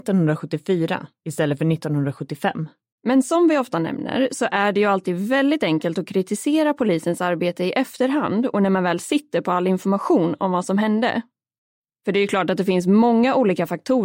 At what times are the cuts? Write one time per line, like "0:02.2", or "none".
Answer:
0:03.0